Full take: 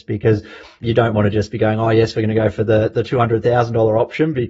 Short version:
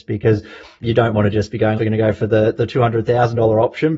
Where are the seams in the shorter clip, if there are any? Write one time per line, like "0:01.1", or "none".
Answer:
0:01.8